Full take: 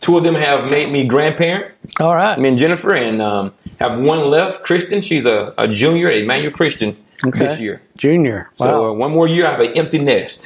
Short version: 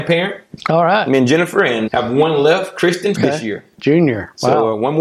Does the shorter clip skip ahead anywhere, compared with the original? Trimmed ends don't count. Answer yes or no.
yes